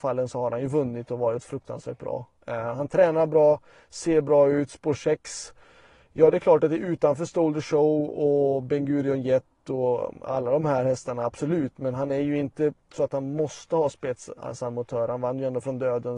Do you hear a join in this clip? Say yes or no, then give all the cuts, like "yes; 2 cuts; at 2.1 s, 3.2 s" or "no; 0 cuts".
no; 0 cuts